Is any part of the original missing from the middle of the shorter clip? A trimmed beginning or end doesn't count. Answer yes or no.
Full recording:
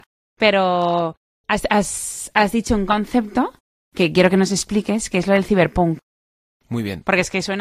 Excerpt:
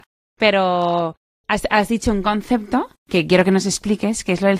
yes